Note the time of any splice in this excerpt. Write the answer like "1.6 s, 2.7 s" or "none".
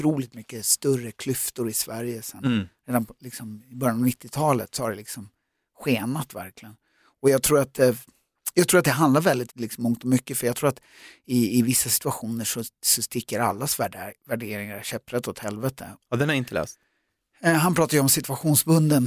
9.5 s, 16.0 s